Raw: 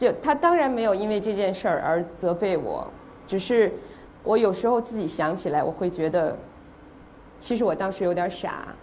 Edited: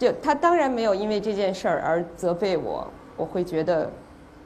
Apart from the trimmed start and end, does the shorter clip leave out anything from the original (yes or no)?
yes